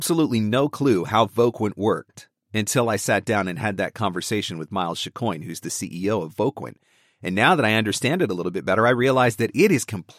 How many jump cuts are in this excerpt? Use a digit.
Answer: 0